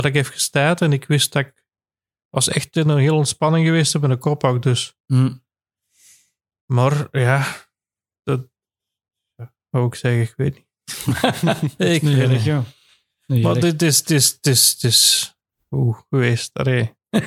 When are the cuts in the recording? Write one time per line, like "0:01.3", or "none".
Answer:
none